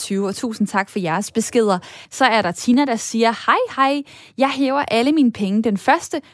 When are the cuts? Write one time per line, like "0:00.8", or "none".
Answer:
0:02.0